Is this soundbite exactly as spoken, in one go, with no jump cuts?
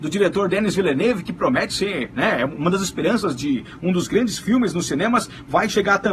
yes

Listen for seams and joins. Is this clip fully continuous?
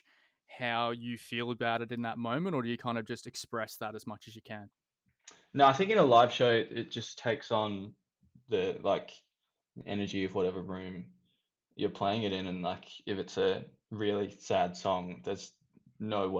yes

